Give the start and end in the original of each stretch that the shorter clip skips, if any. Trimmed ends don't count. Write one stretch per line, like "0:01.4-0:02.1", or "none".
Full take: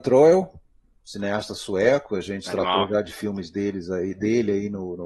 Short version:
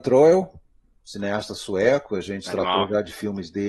none